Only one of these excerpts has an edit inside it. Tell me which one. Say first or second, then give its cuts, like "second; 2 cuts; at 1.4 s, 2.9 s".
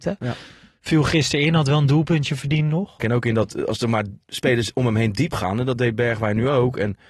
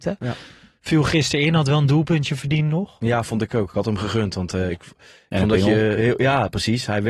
first; 1 cut; at 3.0 s